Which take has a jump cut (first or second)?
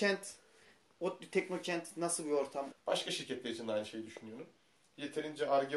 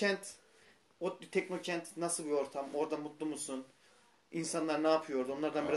first